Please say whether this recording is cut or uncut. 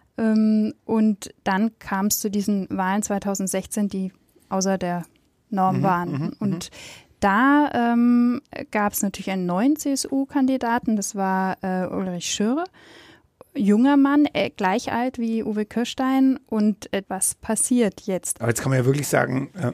cut